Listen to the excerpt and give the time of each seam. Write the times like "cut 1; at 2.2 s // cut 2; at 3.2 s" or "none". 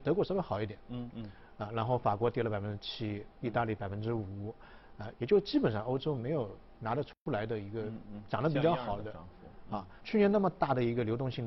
cut 1; at 1.1 s // cut 2; at 5.1 s // cut 3; at 10.0 s